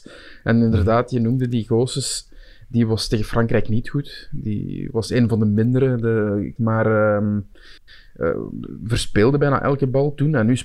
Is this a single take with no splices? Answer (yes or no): no